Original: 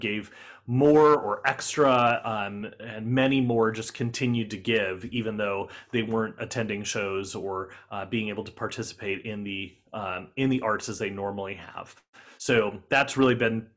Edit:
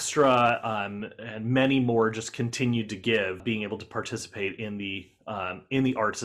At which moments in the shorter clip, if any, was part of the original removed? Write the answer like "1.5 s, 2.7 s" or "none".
3.4 s